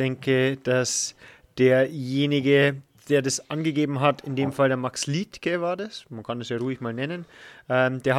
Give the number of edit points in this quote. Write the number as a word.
zero